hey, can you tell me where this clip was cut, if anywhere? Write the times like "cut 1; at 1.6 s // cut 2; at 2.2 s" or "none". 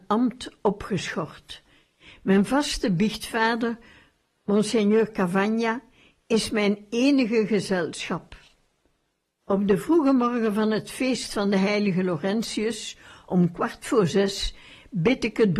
none